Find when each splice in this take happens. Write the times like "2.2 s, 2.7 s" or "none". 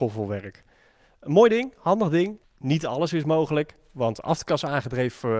2.4 s